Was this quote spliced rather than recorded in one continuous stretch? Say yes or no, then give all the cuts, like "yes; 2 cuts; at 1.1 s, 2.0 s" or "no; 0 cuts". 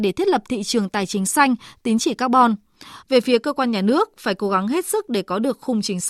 yes; 1 cut; at 3.0 s